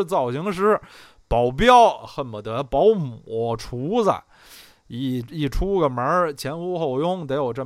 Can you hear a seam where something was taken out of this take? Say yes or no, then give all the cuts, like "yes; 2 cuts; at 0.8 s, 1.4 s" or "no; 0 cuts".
no; 0 cuts